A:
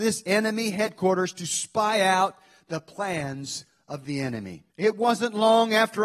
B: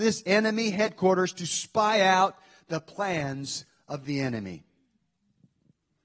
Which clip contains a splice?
A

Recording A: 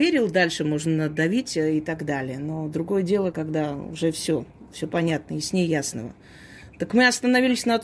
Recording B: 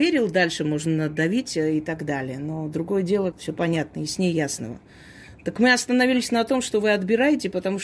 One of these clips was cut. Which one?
B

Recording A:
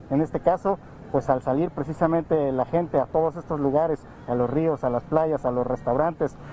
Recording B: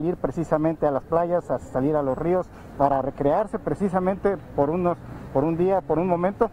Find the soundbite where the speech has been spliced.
B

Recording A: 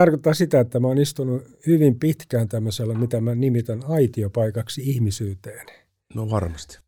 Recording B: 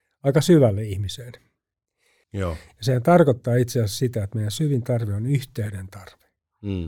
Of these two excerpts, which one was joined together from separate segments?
B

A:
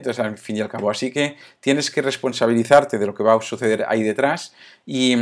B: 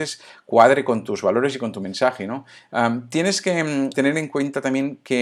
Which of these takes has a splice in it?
B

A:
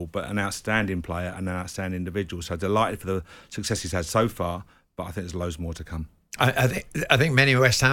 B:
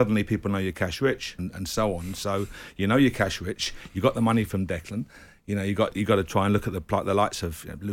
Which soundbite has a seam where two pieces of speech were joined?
B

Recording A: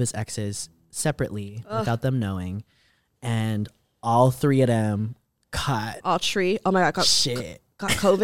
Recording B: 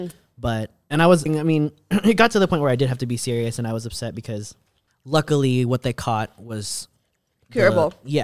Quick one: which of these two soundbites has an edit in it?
B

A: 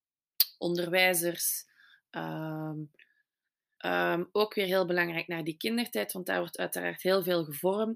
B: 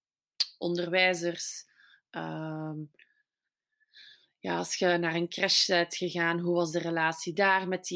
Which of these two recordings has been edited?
A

